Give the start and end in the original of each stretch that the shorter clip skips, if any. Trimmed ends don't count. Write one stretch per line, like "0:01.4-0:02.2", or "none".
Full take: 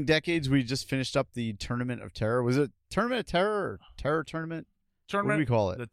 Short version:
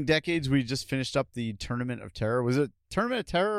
none

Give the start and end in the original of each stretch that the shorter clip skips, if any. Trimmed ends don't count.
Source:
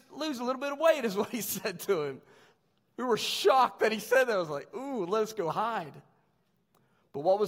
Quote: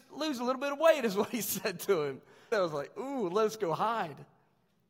0:02.5-0:04.3

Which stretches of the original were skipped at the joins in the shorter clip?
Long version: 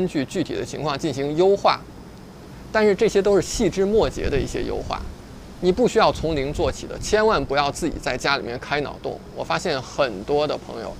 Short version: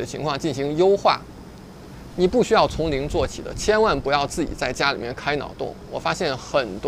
0:02.7-0:05.5

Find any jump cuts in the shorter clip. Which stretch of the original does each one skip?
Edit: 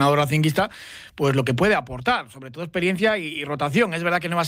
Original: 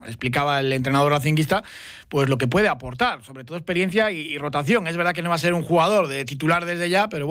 none

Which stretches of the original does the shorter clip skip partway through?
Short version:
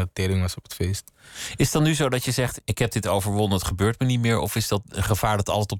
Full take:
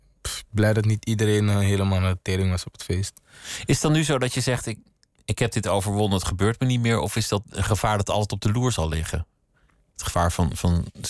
0:04.6-0:05.2

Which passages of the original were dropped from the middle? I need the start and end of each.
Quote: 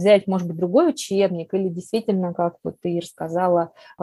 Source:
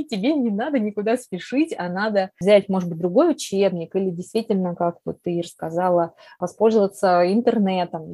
none

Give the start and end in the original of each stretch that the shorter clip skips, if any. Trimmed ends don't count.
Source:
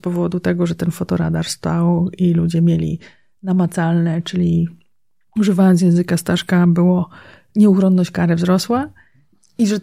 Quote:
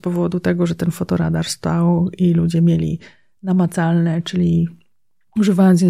none

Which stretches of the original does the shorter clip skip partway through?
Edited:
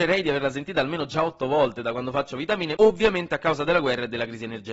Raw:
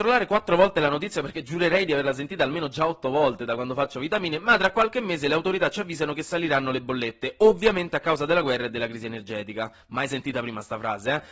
0:04.4-0:07.4

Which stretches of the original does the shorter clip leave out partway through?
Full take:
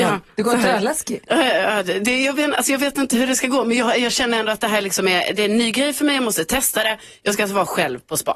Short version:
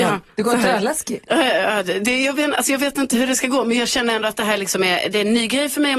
0:03.8-0:04.0

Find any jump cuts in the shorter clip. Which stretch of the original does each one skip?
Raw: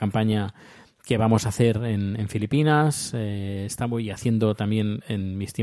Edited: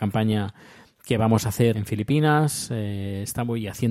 0:01.7-0:02.2

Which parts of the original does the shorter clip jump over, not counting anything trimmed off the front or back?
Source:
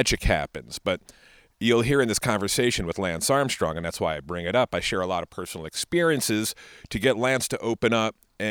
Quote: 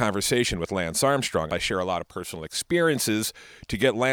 0:03.7-0:04.7

